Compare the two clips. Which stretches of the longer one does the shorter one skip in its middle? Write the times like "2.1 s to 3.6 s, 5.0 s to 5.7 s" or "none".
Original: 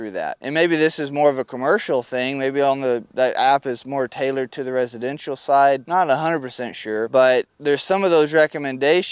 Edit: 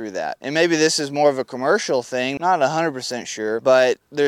2.4 s to 5.9 s